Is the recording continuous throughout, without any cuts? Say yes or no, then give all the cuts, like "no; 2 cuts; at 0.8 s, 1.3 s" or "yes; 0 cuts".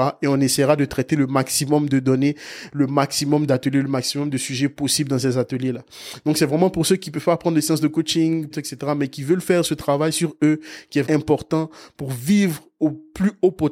no; 2 cuts; at 8.5 s, 11.0 s